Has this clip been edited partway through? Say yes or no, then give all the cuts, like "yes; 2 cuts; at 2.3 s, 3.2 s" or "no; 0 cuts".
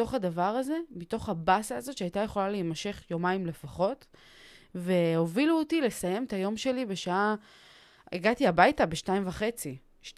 no; 0 cuts